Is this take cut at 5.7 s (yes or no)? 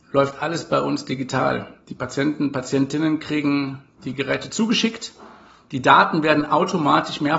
yes